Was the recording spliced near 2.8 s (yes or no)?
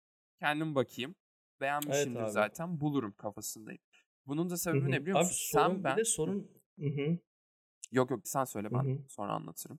no